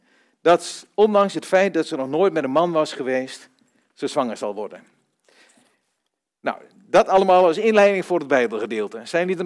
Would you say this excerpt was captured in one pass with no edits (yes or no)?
yes